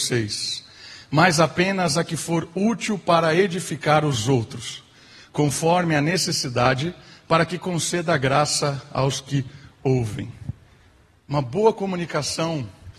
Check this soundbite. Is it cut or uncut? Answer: uncut